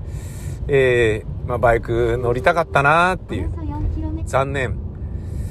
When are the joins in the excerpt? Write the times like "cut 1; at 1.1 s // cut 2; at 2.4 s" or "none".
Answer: cut 1; at 4.2 s